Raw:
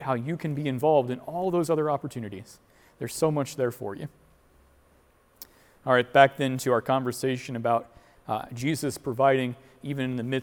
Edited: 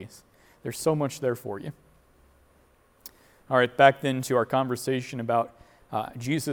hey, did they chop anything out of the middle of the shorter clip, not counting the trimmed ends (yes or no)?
no